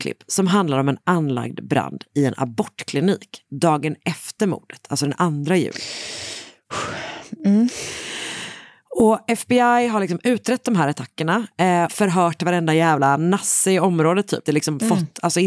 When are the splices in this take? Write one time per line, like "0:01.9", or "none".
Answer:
0:11.9
0:14.4